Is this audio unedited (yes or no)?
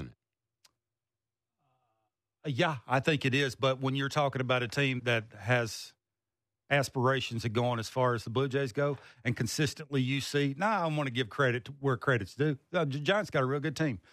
no